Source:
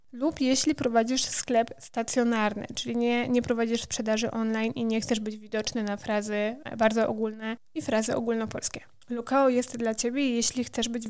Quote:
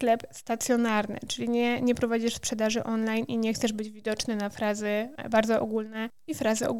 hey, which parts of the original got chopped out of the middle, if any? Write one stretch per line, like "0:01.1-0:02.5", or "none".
none